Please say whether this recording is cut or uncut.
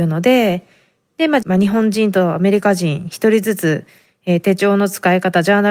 cut